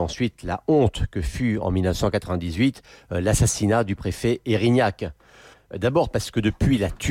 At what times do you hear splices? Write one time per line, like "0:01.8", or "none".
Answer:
0:05.5